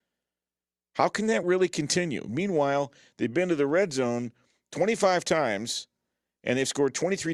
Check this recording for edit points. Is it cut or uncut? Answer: uncut